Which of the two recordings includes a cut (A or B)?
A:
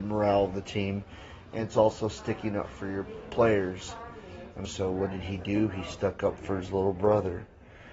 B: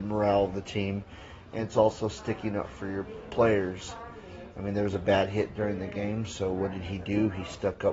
A